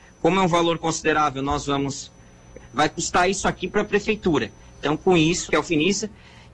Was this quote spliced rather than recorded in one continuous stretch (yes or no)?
yes